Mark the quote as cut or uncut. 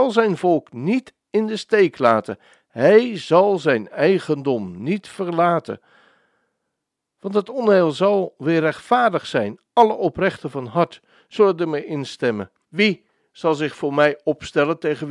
cut